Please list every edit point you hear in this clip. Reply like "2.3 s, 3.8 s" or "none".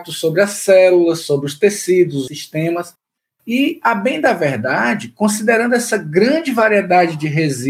2.3 s